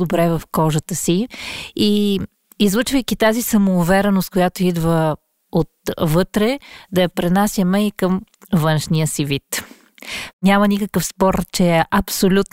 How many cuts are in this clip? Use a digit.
1